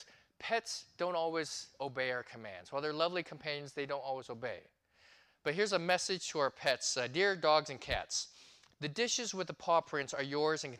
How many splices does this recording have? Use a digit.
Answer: 0